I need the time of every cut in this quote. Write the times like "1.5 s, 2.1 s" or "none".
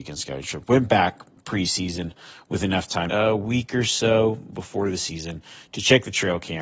3.1 s